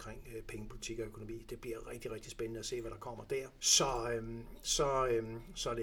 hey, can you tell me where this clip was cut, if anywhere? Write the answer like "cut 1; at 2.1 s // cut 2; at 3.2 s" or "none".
cut 1; at 3.6 s // cut 2; at 4.6 s